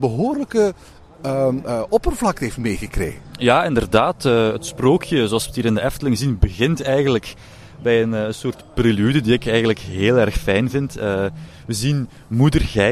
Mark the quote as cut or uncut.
uncut